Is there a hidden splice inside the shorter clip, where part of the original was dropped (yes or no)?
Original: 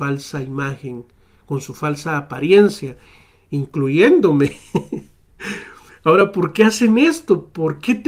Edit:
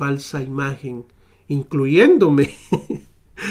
yes